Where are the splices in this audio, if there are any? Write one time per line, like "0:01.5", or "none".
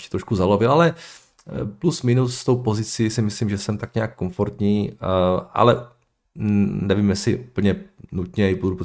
none